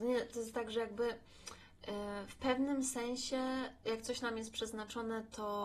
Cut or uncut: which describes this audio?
uncut